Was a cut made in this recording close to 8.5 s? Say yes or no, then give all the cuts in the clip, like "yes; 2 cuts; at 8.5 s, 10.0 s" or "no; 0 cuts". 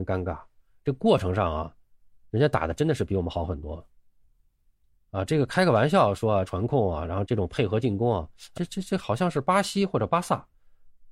yes; 2 cuts; at 6.4 s, 8.5 s